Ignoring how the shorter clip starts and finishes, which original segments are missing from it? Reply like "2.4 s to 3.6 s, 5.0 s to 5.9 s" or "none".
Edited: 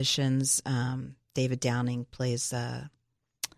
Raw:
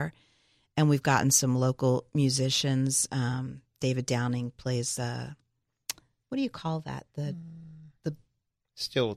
none